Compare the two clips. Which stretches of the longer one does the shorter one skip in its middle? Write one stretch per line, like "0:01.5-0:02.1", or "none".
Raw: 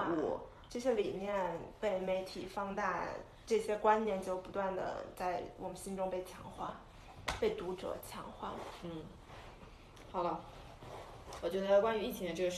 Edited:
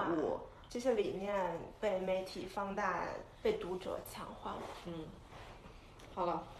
0:03.4-0:07.4